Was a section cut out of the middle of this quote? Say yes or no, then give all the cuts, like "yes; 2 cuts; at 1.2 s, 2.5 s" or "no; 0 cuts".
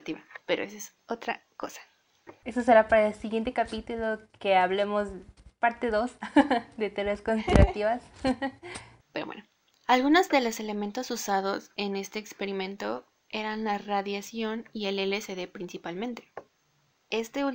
yes; 1 cut; at 9.0 s